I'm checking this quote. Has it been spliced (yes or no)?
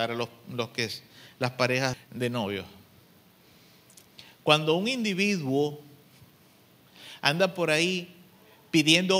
yes